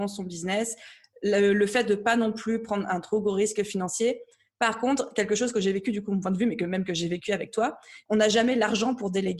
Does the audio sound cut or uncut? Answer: cut